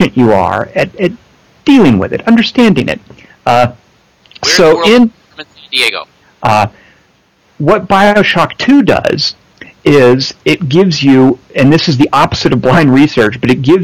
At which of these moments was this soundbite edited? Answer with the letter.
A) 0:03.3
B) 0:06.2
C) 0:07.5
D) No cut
B